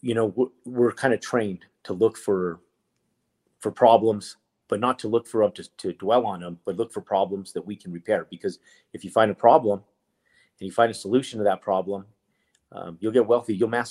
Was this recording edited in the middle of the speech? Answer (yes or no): no